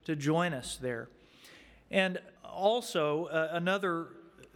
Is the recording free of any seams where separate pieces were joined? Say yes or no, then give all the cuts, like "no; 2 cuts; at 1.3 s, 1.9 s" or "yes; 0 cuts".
no; 1 cut; at 2.4 s